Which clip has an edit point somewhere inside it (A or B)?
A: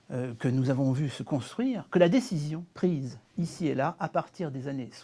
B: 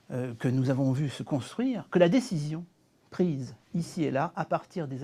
A